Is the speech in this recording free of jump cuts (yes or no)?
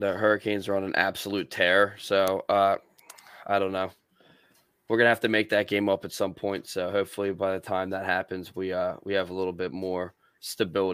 yes